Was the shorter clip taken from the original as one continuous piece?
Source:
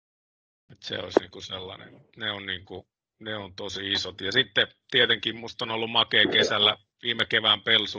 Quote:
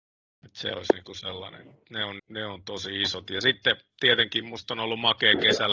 no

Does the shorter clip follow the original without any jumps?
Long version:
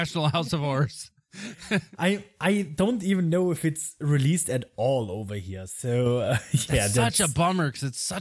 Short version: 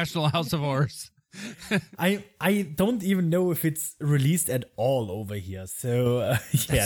yes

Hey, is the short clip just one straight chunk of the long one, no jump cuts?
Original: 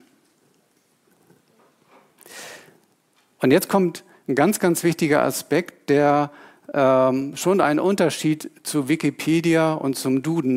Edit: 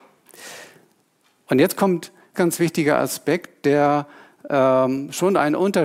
no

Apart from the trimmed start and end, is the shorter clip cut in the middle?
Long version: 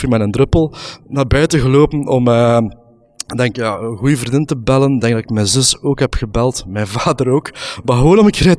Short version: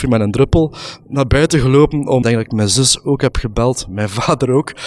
yes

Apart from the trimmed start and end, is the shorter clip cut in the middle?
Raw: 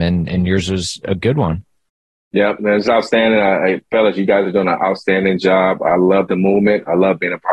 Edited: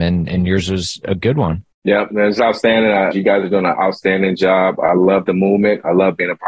yes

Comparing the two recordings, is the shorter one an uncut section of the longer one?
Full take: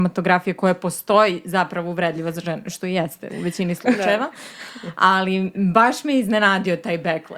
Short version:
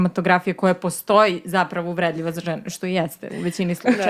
yes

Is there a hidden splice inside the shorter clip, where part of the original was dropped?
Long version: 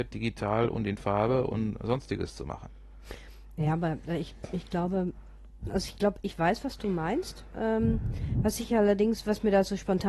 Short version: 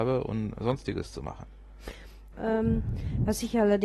yes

